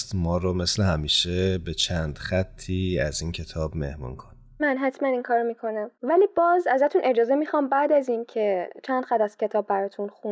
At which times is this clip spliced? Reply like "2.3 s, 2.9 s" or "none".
4.6 s, 5.9 s